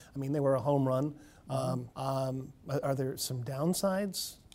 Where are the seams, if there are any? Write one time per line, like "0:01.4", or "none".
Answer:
0:01.9

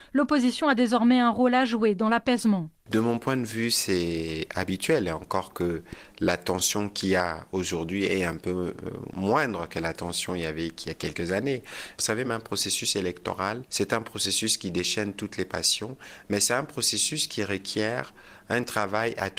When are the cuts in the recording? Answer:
0:12.2

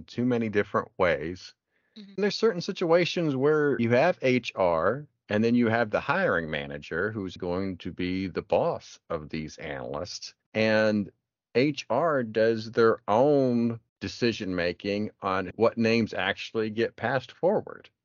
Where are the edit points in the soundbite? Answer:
0:07.4

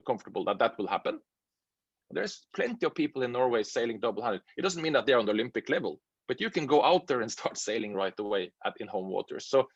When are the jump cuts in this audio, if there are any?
0:02.0

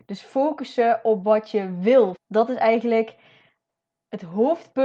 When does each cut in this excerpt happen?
0:02.2

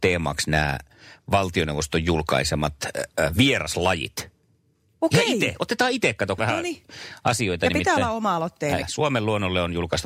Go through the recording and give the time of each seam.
0:06.4
0:08.8

